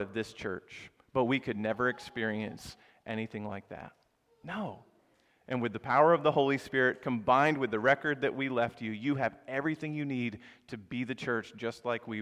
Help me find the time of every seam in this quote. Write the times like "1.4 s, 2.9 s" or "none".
5.4 s